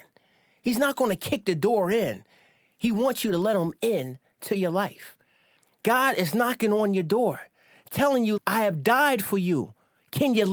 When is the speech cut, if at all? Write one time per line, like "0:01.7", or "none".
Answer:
0:08.4

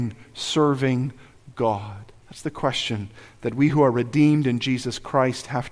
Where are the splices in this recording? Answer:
0:02.2

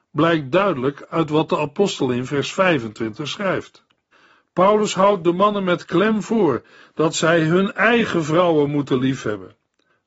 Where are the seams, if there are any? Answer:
none

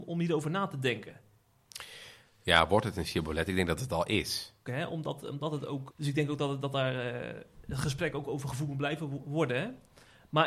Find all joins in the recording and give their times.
0:04.7
0:05.9

